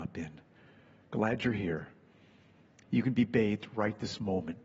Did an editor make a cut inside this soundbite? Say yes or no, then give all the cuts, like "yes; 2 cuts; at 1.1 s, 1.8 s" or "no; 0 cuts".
no; 0 cuts